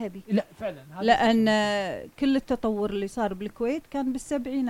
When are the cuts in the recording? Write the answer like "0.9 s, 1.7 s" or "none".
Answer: none